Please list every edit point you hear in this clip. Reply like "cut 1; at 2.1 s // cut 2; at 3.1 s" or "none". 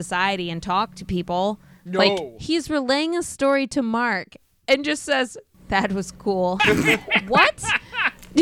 cut 1; at 5.5 s // cut 2; at 6.6 s